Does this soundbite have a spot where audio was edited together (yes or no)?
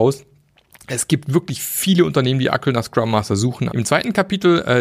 yes